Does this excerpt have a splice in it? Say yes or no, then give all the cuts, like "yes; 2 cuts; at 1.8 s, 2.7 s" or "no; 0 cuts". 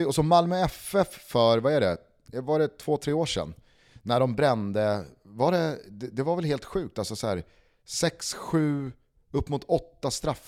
no; 0 cuts